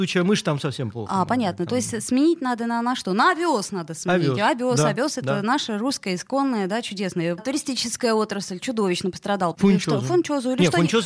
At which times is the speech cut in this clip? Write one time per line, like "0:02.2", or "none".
0:07.4
0:09.5